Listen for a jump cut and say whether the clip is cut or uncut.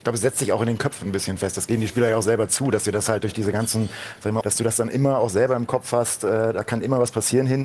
cut